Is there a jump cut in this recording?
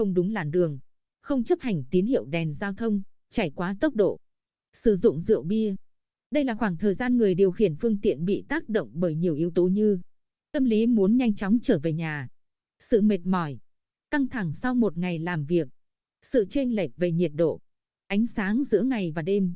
yes; 1 cut; at 1.1 s

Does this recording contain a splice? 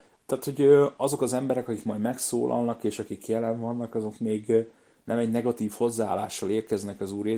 no; 0 cuts

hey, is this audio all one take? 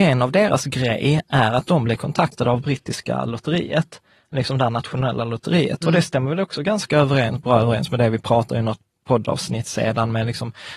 no; 1 cut; at 5.8 s

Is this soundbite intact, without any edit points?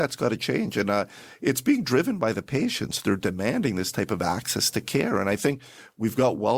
yes; 0 cuts

